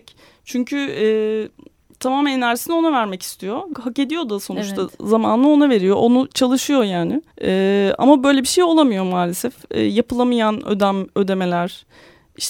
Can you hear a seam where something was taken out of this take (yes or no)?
yes